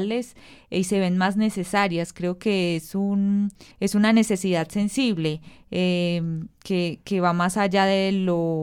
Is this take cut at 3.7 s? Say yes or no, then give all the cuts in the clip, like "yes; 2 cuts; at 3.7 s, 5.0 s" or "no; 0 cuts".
yes; 1 cut; at 3.7 s